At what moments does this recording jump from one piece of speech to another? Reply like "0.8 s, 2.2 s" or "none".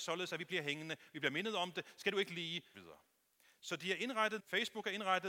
2.7 s, 4.4 s